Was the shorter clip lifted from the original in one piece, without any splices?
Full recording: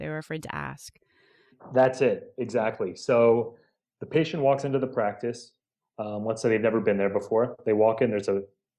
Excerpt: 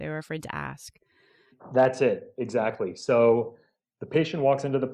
yes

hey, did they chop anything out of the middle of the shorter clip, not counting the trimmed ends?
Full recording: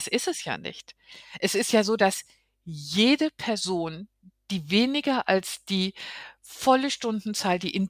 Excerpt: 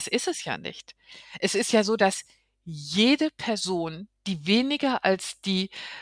yes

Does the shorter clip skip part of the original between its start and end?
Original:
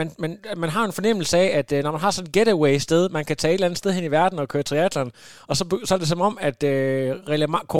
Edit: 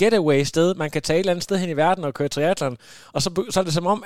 no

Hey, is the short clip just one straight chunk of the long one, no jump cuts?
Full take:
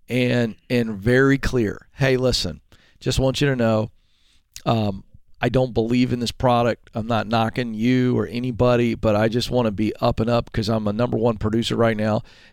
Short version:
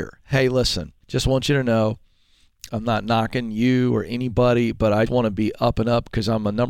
no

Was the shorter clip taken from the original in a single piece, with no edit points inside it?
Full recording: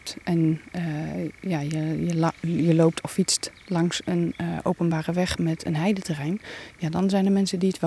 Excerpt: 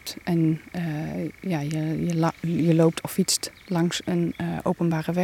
yes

